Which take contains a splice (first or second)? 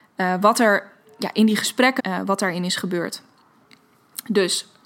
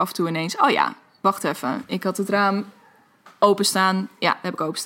first